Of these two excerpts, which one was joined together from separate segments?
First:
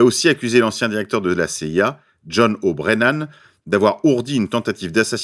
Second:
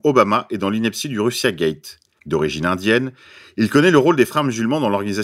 second; 1 cut; at 2.2 s

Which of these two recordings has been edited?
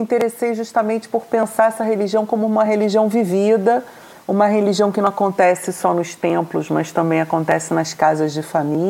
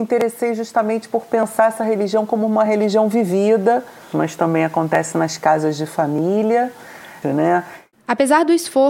second; 2 cuts; at 4.1 s, 7.2 s

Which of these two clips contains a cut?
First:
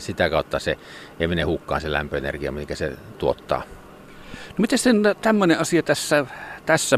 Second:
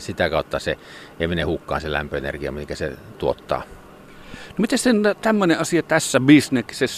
second; 1 cut; at 5.8 s

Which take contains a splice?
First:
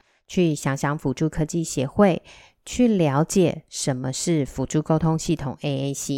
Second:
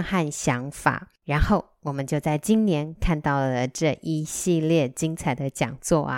second; 1 cut; at 1.2 s

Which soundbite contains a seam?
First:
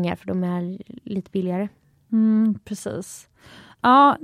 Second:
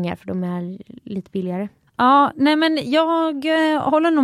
second; 1 cut; at 1.9 s

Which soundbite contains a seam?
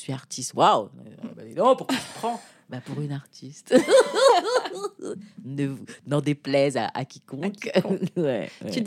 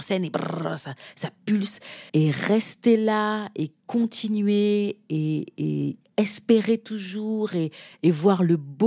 second; 1 cut; at 2.1 s

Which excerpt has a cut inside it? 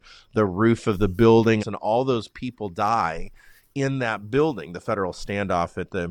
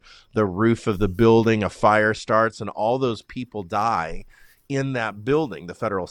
first; 1 cut; at 1.6 s

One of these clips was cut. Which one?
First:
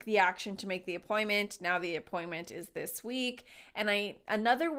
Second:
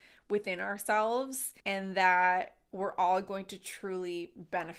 second; 1 cut; at 1.6 s

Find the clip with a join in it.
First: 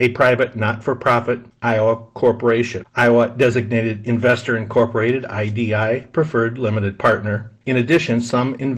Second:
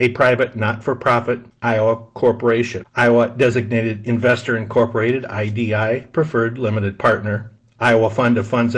first; 1 cut; at 7.6 s

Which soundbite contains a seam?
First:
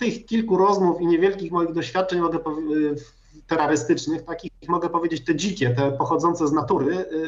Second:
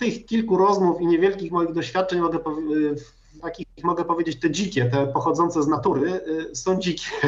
second; 1 cut; at 3.4 s

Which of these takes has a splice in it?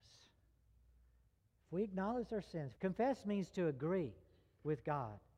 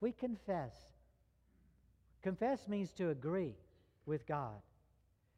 first; 1 cut; at 2.8 s

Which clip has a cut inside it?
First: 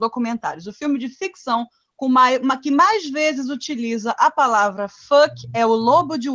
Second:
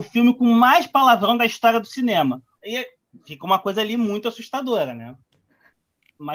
second; 1 cut; at 2.6 s

